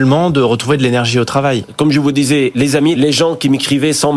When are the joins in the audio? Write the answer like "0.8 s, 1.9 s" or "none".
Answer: 1.6 s, 3.0 s